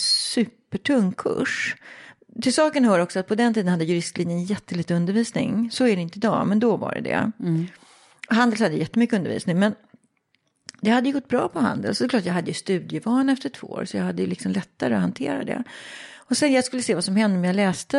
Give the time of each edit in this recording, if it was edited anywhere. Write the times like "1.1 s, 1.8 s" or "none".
none